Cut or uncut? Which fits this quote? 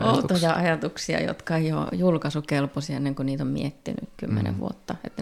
uncut